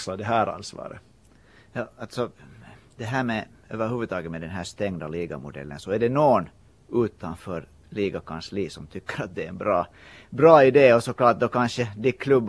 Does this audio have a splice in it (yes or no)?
no